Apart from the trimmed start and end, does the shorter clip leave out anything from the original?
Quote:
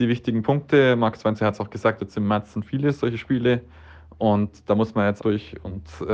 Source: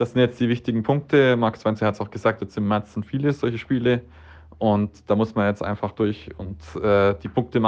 yes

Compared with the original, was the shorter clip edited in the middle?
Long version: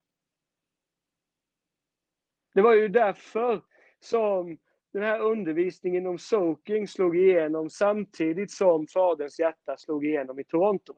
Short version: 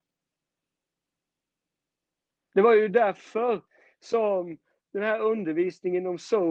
no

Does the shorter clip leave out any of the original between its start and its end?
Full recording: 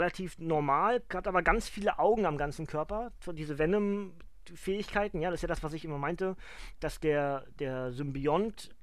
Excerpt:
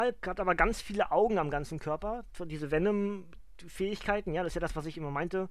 no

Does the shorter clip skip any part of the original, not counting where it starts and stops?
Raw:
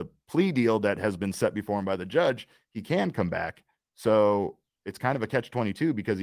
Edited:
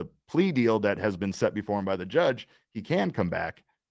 no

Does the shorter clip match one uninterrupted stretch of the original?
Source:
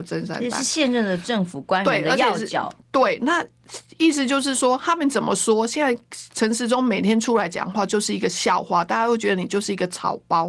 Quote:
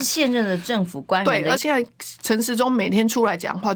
no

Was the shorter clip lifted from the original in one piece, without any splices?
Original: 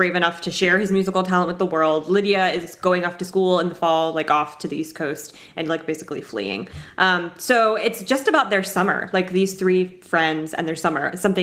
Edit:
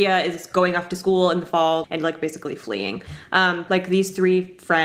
no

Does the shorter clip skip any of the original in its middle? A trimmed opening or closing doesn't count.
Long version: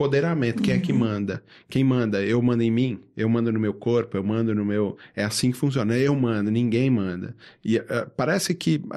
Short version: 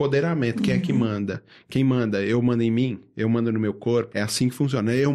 yes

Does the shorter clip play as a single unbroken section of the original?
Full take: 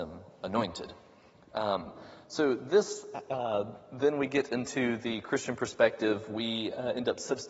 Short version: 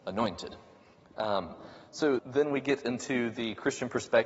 no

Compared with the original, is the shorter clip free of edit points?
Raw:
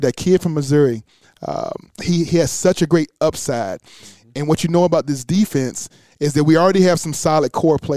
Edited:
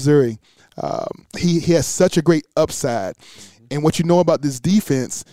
yes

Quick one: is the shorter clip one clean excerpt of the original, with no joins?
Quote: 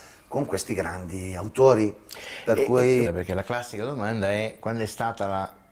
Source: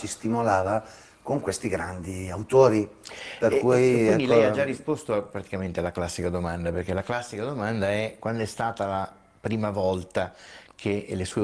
no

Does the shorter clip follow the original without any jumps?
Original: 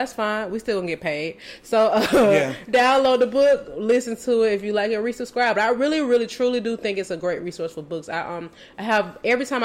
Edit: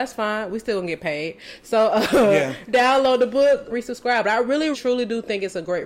no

